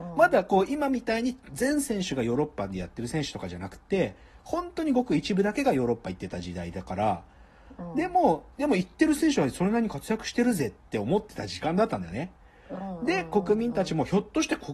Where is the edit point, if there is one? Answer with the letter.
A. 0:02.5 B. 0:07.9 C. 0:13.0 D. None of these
D